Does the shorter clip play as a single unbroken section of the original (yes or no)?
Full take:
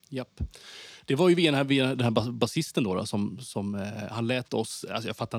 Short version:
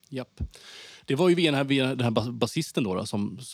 yes